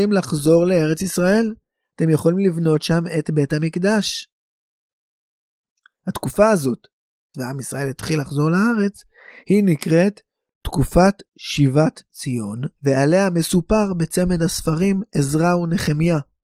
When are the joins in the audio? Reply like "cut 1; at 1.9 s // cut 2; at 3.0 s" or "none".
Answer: cut 1; at 7.3 s // cut 2; at 11.3 s // cut 3; at 12.8 s